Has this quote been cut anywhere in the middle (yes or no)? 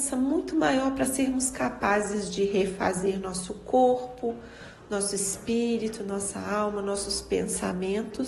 no